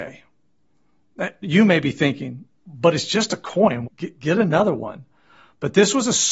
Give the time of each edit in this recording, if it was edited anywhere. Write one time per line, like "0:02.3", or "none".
0:02.5
0:03.9